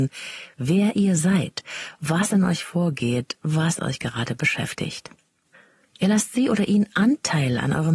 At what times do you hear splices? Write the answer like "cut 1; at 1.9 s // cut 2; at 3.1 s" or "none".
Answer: none